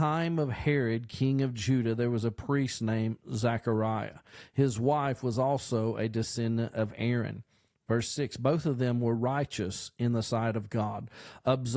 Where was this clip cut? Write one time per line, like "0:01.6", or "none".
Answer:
none